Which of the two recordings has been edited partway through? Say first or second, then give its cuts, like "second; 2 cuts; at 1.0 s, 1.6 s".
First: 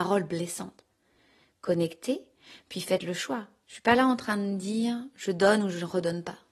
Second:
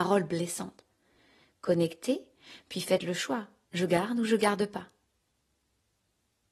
first; 1 cut; at 3.6 s